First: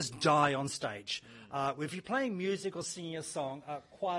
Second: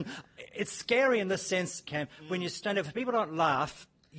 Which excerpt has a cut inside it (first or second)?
second